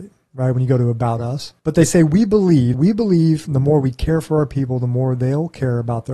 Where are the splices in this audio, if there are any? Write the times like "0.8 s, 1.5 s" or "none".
1.6 s, 2.7 s